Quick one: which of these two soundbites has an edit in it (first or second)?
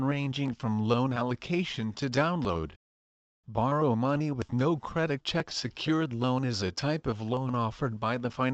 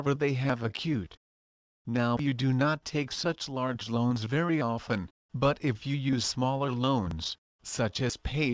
second